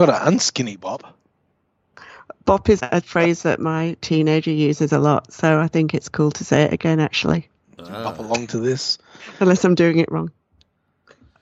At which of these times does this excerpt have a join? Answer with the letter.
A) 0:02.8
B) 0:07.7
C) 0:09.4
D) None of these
A